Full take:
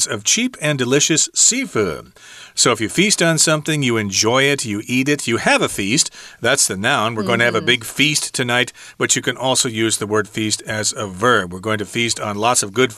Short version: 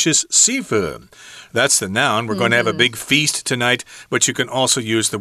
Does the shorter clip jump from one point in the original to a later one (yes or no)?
yes